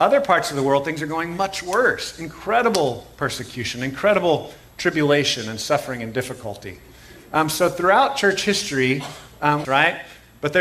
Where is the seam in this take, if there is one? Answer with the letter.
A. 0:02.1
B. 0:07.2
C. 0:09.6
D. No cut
C